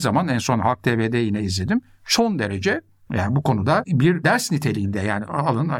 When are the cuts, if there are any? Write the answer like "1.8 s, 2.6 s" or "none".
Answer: none